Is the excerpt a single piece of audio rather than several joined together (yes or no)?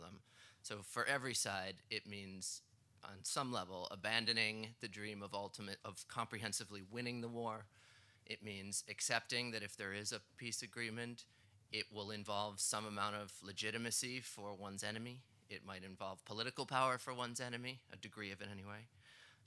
no